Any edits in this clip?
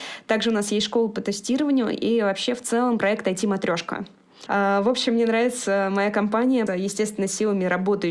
yes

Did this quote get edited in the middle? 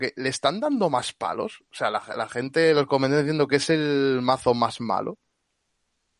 no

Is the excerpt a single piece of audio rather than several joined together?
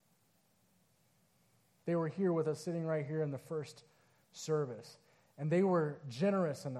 no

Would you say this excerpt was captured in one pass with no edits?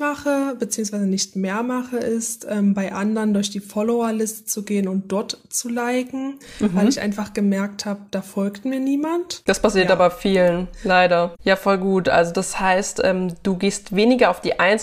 no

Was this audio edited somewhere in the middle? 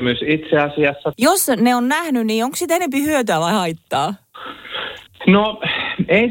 yes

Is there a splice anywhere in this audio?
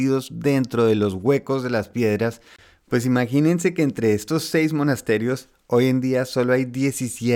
no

